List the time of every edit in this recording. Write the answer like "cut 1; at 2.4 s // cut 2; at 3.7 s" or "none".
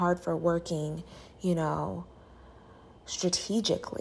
none